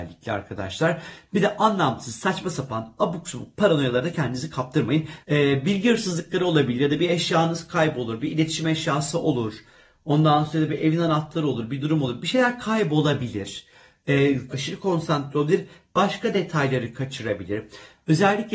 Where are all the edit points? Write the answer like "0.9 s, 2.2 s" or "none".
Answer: 5.2 s, 14.5 s